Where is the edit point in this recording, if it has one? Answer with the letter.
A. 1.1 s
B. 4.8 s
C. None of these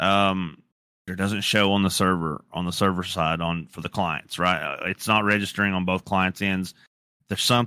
A